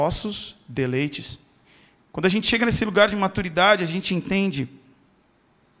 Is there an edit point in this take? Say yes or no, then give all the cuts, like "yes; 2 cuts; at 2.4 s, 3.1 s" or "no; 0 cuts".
no; 0 cuts